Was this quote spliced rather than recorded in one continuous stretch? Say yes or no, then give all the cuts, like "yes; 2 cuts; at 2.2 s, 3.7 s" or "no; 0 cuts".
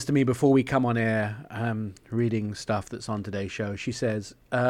no; 0 cuts